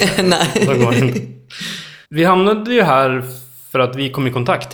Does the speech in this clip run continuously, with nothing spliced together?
no; 1 cut; at 2.0 s

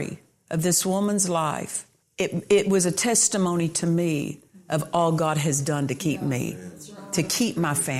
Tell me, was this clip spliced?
yes; 1 cut; at 2.0 s

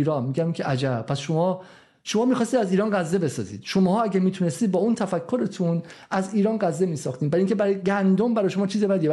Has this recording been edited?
no; 0 cuts

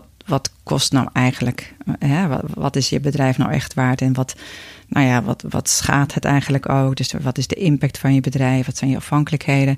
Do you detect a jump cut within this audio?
no; 0 cuts

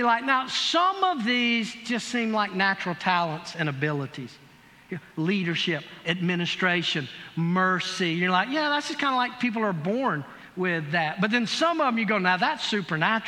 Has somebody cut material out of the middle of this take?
yes; 1 cut; at 6.0 s

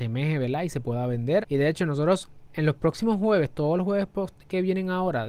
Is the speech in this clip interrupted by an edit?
yes; 1 cut; at 1.4 s

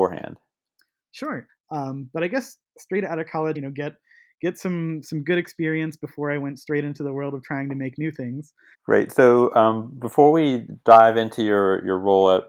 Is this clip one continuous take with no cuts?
no; 3 cuts; at 1.5 s, 3.5 s, 8.7 s

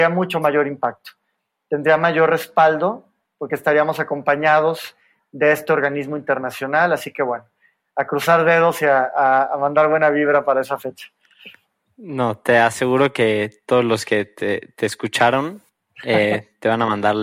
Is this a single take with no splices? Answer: yes; 0 cuts

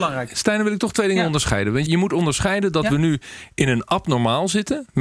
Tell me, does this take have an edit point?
yes; 1 cut; at 1.9 s

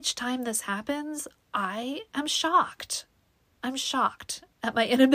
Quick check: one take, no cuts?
yes; 0 cuts

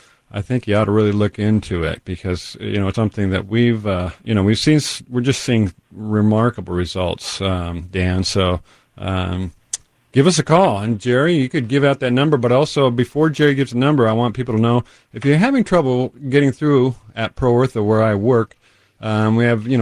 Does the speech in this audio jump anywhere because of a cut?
yes; 2 cuts; at 2.9 s, 4.2 s

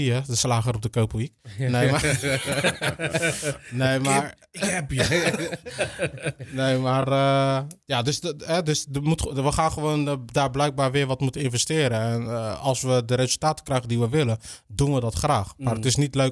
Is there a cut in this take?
no; 0 cuts

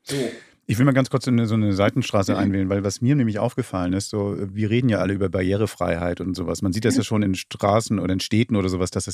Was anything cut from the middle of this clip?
no; 0 cuts

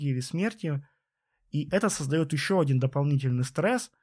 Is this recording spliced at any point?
no; 0 cuts

